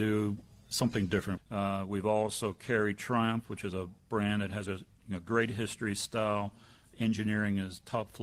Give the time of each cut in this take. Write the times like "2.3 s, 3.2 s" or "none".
1.4 s, 6.9 s